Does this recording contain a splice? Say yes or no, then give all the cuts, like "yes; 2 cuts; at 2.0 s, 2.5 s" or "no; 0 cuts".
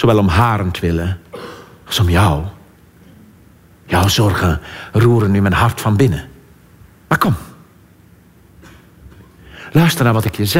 no; 0 cuts